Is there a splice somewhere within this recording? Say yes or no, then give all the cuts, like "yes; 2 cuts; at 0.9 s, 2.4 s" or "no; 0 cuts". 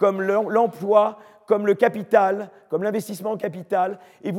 no; 0 cuts